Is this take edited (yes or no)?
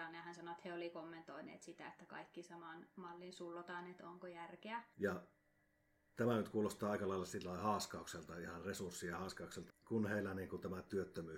yes